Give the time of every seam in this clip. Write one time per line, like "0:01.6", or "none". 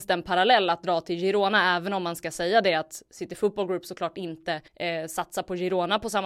0:04.7